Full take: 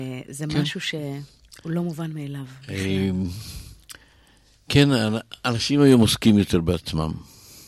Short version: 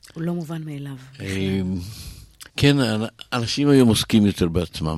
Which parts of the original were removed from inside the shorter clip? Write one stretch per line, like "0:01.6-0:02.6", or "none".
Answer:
0:04.0-0:04.6